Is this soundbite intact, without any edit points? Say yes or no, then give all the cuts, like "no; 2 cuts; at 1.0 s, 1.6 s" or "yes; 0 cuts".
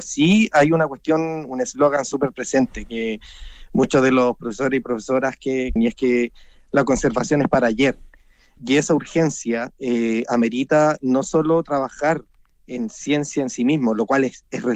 no; 2 cuts; at 5.8 s, 8.6 s